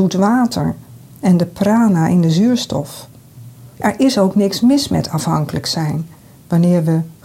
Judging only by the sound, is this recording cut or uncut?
cut